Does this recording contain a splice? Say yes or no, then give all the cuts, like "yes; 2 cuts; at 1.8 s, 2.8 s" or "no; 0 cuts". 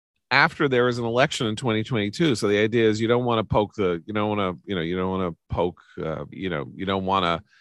yes; 1 cut; at 6.3 s